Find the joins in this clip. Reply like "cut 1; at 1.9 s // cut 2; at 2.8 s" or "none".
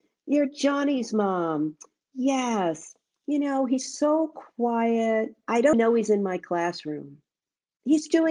cut 1; at 5.7 s